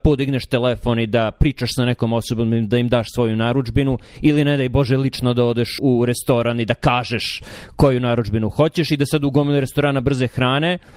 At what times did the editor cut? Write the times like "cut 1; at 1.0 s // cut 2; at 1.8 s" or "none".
cut 1; at 5.8 s